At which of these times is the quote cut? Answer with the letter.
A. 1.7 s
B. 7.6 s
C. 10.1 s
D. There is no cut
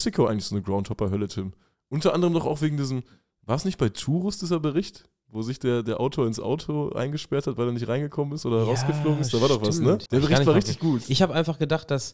C